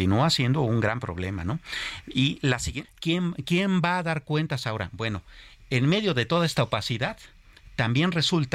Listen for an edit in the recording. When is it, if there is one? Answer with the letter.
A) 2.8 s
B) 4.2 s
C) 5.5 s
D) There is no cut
A